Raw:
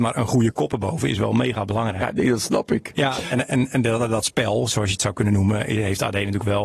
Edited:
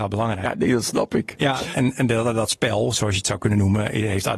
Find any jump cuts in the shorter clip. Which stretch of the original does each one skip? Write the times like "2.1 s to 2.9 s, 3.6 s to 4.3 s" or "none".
3.3 s to 3.5 s

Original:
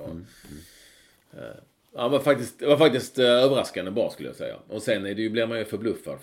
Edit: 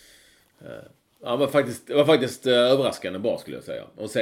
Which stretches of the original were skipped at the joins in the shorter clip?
none

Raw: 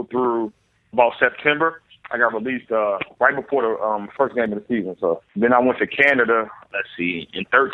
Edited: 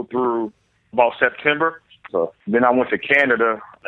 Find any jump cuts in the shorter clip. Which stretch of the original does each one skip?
2.1 s to 5.0 s

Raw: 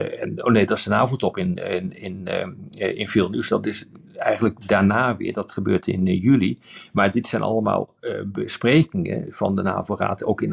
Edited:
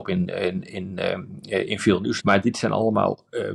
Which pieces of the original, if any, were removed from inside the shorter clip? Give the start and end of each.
3.5 s to 6.9 s

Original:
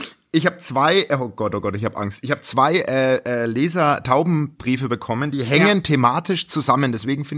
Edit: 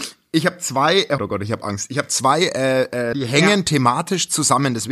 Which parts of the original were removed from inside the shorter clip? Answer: 1.2 s to 1.5 s, 3.5 s to 5.3 s

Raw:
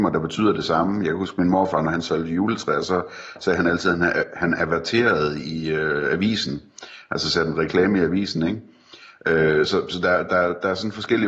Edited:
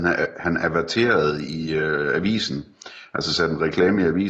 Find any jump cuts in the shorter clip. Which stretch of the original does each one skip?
none

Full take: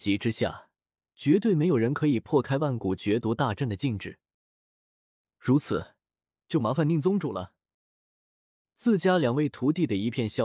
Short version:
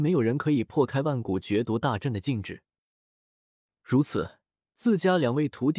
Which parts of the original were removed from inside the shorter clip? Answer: 6.2 s to 8.6 s

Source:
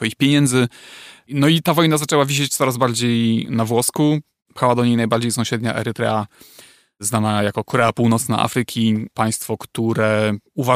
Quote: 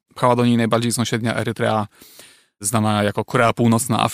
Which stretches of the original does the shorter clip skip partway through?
none

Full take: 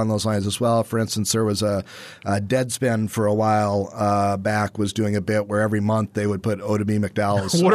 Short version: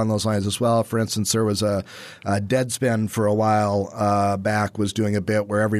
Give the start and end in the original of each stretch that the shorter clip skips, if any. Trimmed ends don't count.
none

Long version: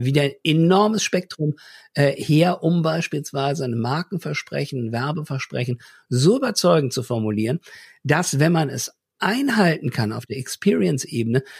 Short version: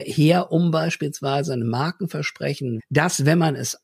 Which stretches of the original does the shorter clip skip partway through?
4.9 s to 7.9 s

